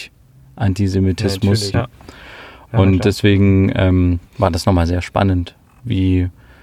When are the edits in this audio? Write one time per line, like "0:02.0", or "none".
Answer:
0:01.7
0:04.3